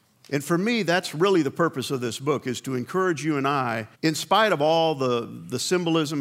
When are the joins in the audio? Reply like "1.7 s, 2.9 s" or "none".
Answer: 3.9 s